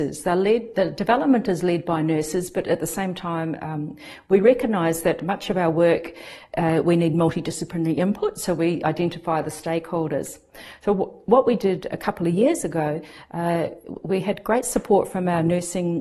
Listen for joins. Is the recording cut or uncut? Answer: cut